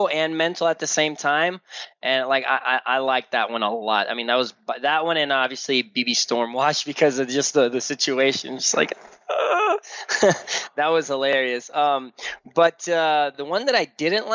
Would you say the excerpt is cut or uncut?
cut